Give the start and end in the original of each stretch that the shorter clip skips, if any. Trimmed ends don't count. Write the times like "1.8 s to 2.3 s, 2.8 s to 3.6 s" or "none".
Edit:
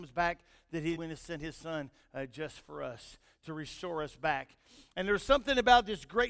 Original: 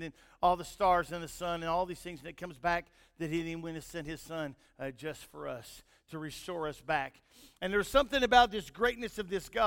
3.4 s to 3.6 s